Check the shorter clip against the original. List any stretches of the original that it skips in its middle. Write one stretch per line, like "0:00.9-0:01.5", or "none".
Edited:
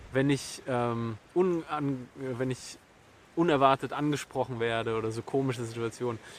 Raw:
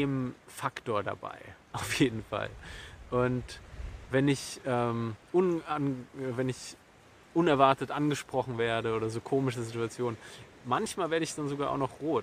none

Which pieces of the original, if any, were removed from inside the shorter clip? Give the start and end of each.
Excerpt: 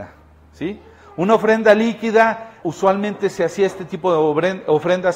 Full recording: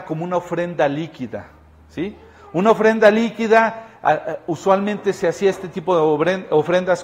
0:04.0-0:04.5

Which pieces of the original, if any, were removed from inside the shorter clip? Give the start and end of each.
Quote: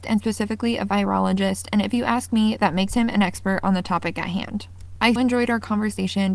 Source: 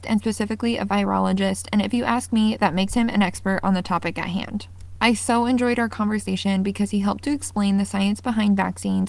0:05.2-0:05.4

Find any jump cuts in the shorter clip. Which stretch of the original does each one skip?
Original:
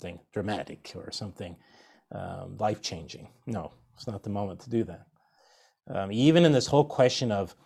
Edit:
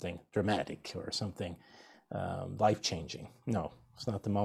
none

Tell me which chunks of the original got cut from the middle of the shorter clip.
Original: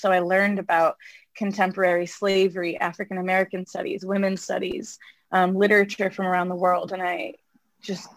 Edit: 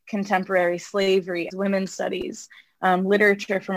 0:02.8-0:04.0

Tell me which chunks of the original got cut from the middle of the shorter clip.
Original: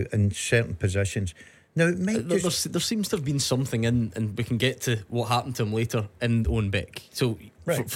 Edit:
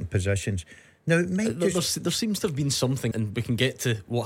0:03.8-0:04.1

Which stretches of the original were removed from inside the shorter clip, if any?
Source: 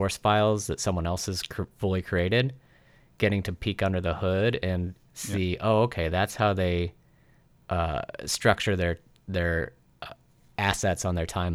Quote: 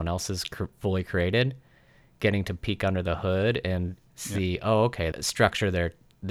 0:06.1-0:08.2

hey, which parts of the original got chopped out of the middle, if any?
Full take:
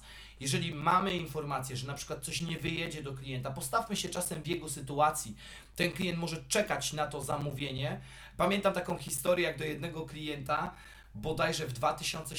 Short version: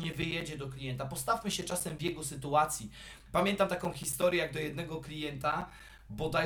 0:05.7-0:08.3

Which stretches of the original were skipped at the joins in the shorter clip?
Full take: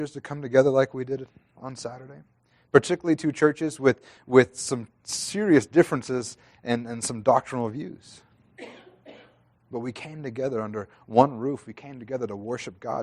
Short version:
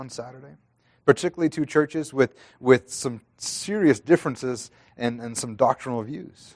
none

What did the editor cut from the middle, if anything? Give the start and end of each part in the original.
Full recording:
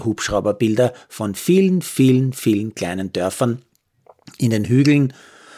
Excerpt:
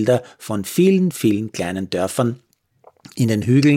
0:01.8-0:02.3

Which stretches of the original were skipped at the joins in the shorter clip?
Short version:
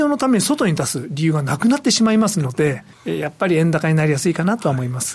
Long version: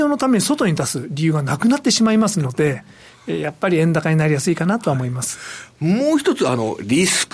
0:02.9-0:03.1

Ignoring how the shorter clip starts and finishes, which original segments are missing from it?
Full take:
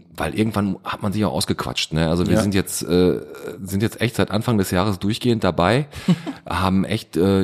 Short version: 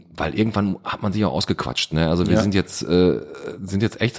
none

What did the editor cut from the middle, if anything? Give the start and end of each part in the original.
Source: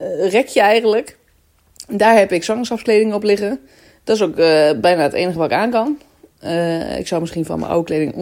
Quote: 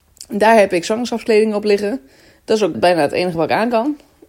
0:04.3-0:04.8

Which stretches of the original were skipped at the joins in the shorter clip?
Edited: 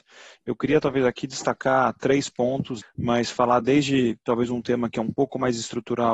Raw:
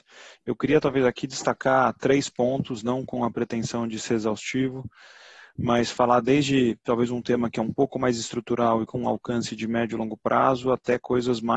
0:02.8-0:05.4

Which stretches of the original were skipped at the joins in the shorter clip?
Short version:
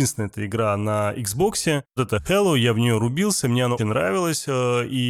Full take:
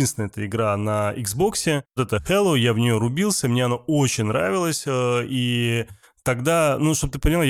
0:03.8-0:04.2

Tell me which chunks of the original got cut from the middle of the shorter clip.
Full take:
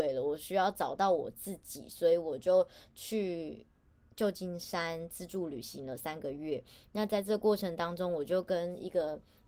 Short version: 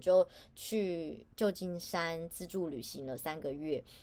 0:03.7-0:04.1

